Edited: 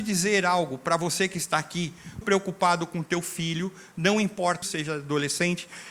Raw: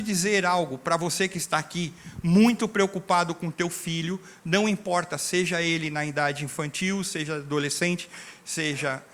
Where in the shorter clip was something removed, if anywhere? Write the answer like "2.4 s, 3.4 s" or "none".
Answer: 2.2 s, 4.6 s